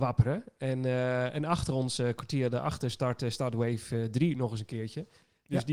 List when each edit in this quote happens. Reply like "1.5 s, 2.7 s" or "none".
none